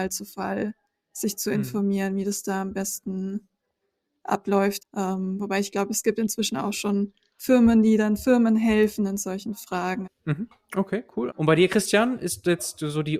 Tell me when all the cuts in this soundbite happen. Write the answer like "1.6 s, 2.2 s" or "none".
4.8 s, 10.0 s, 11.3 s

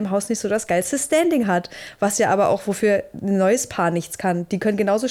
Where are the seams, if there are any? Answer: none

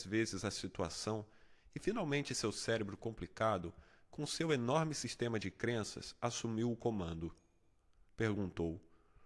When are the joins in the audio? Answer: 8.1 s

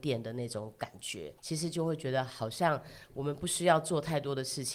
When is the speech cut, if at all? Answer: 1.4 s

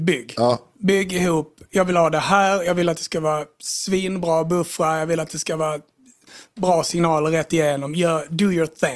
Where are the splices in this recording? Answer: none

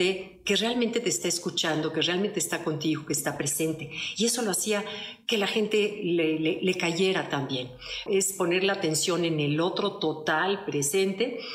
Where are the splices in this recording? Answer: 8.1 s

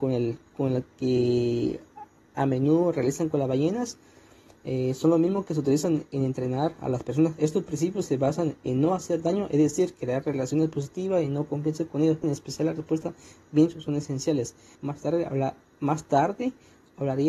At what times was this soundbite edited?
12.2 s, 14.8 s

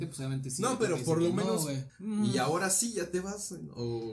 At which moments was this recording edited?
1.9 s

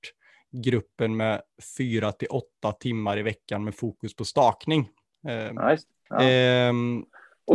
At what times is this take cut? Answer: 6.1 s

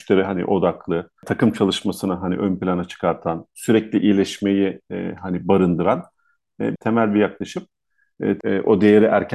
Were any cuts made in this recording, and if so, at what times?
6.8 s, 8.4 s

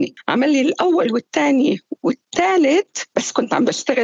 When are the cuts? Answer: 3.1 s

